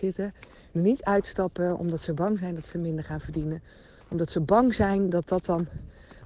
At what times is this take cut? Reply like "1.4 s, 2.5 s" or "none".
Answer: none